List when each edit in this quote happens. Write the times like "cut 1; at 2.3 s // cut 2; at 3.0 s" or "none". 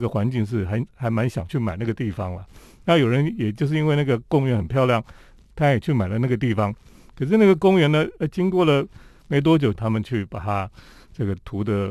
cut 1; at 9.7 s